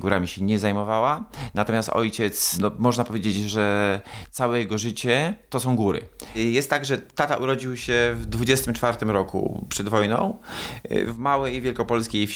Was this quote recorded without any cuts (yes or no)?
yes